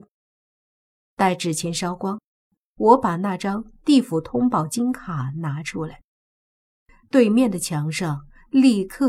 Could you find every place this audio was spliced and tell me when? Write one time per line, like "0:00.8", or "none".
0:01.1